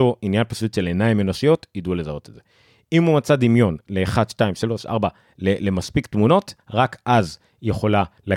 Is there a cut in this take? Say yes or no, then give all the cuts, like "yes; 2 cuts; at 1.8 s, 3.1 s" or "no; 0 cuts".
yes; 1 cut; at 6.6 s